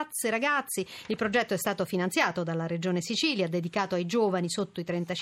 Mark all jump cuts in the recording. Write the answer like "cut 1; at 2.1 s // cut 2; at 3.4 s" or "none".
none